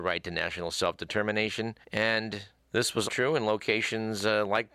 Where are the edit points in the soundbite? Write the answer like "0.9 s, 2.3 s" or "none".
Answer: 1.8 s, 3.1 s